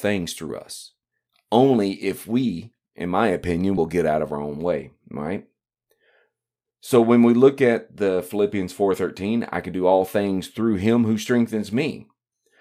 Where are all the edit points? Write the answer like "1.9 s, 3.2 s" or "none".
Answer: none